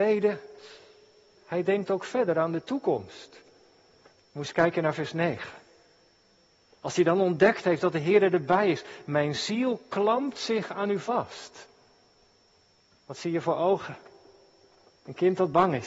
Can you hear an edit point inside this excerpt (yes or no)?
yes